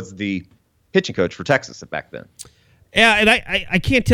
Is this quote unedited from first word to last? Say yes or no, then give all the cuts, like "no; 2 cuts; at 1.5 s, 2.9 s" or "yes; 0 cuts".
yes; 0 cuts